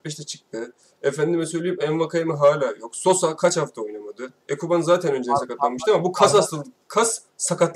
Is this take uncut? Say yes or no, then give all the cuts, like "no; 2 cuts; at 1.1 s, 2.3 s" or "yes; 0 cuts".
yes; 0 cuts